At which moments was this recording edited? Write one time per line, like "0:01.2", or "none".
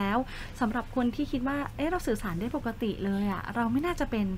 none

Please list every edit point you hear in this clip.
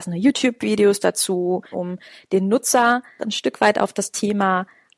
0:01.7
0:03.2

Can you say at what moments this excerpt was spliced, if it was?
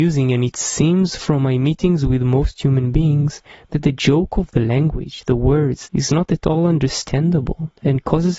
0:05.9

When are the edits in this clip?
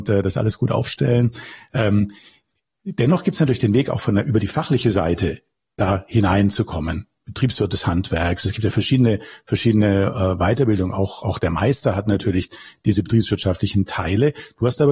none

